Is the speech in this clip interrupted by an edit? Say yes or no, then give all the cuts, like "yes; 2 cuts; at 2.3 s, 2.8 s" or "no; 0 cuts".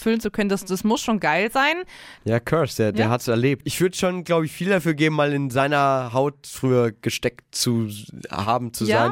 yes; 2 cuts; at 2.2 s, 3.6 s